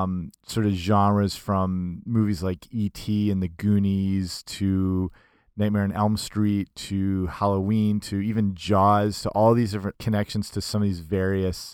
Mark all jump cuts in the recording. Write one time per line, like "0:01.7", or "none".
0:09.9